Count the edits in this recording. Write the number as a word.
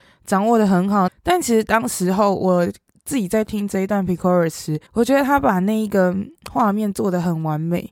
two